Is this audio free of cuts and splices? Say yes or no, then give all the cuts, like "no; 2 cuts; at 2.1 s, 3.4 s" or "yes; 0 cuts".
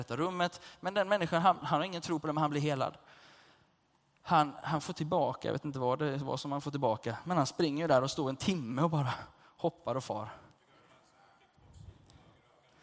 no; 1 cut; at 1.6 s